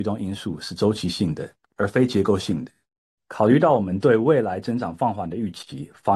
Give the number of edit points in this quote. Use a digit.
1